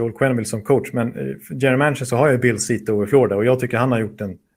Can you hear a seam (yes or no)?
no